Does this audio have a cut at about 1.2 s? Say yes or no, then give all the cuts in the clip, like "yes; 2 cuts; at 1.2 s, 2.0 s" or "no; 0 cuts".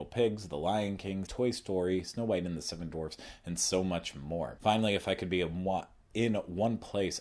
yes; 2 cuts; at 1.2 s, 4.6 s